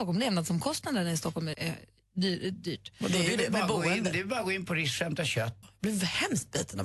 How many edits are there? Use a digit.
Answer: 2